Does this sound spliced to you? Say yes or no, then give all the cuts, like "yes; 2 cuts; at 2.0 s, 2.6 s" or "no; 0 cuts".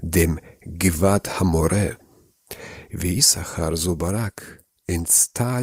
no; 0 cuts